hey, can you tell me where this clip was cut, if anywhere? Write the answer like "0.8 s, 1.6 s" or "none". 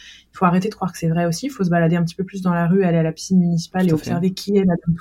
none